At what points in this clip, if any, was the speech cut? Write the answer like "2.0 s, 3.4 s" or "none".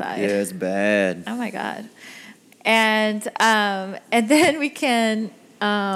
none

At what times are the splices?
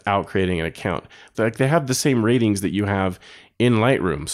1.3 s

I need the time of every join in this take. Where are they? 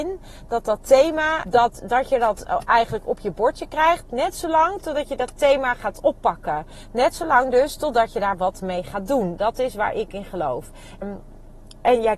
1.5 s, 11.0 s

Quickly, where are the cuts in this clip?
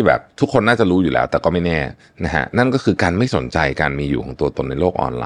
none

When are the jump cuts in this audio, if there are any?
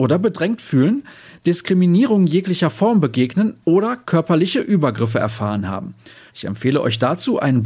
6.3 s

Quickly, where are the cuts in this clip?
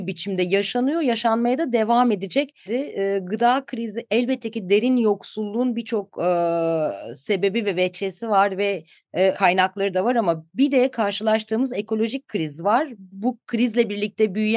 2.7 s, 9.3 s, 13.1 s

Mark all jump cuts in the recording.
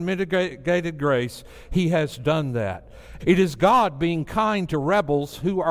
3.2 s

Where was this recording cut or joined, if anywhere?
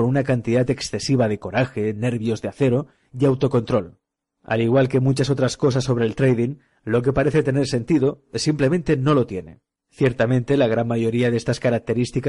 none

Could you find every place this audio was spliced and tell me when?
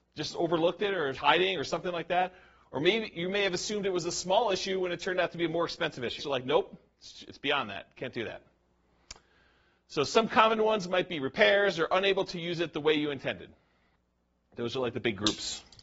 1.1 s, 6.2 s

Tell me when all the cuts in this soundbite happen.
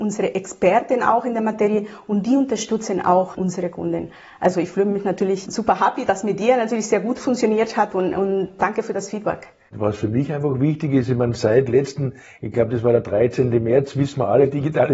none

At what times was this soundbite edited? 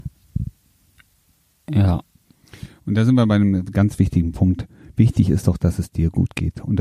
none

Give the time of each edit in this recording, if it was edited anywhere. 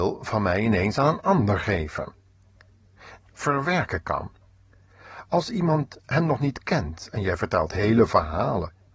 3.2 s

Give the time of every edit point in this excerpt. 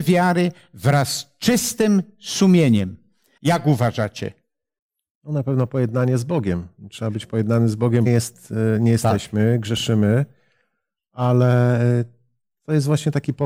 3.4 s, 8.1 s

